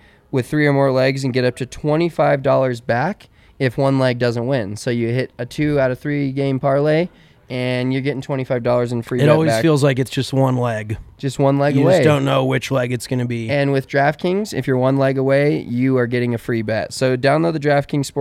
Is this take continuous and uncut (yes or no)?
yes